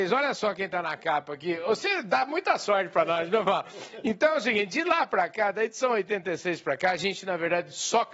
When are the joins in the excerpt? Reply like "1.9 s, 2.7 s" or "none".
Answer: none

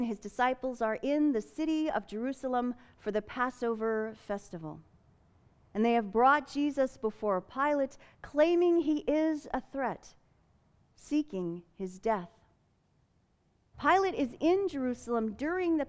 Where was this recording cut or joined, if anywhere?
13.7 s

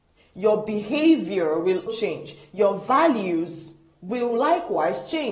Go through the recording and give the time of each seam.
1.9 s

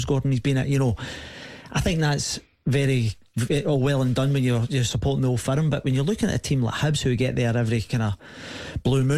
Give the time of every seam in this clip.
none

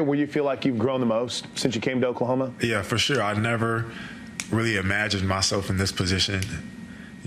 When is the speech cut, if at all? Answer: none

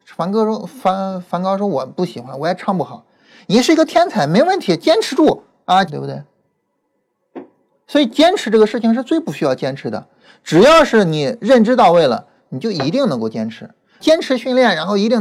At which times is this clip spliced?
5.9 s, 12.4 s, 14.0 s

